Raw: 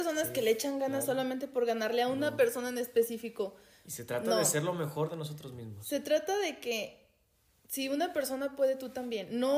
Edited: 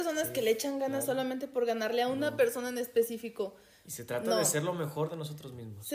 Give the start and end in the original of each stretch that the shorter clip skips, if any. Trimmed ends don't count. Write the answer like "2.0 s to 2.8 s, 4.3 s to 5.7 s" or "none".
none